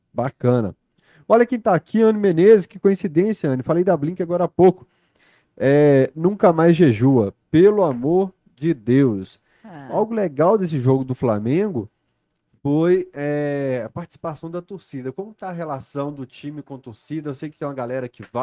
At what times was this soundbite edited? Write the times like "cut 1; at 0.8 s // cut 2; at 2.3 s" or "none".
none